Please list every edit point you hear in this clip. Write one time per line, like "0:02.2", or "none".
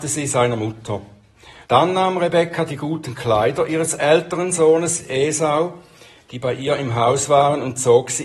0:01.6